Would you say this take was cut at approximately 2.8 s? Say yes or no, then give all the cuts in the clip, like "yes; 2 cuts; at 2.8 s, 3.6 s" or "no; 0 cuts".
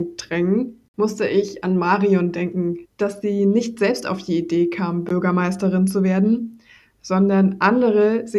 yes; 1 cut; at 2.8 s